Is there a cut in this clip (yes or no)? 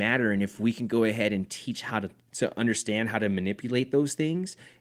yes